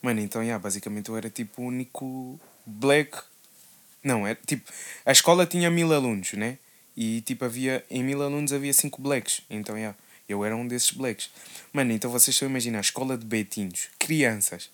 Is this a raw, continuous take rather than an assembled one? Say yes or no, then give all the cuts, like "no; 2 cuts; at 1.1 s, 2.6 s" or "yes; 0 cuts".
yes; 0 cuts